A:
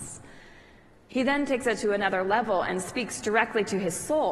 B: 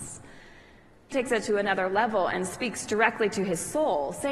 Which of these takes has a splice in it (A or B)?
B